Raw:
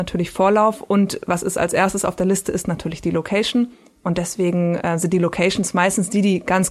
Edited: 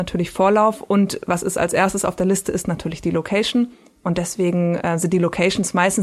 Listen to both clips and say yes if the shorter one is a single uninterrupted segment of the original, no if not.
yes